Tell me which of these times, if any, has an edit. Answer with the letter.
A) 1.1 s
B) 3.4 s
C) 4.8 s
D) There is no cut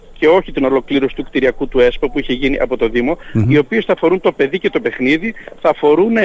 B